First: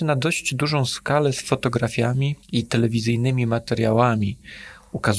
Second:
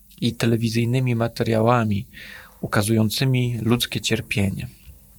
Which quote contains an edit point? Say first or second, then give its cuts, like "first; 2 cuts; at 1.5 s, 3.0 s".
first; 1 cut; at 2.4 s